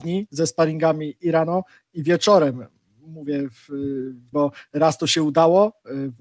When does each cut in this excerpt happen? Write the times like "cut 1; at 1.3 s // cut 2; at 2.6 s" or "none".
cut 1; at 4.3 s

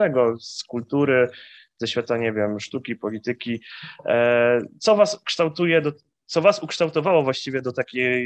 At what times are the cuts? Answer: none

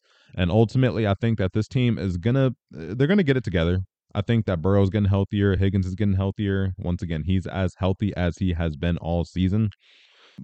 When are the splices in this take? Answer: none

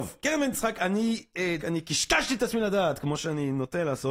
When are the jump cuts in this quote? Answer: cut 1; at 1.6 s

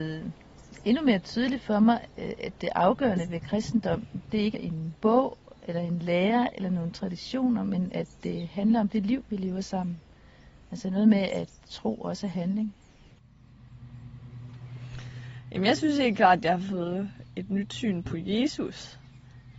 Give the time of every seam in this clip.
cut 1; at 4.5 s

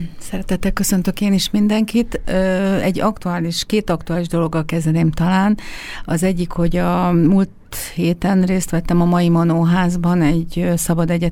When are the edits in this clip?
none

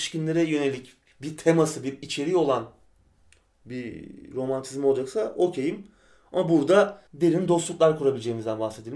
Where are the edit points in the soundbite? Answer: cut 1; at 7.1 s

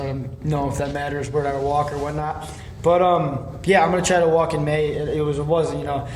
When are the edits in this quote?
none

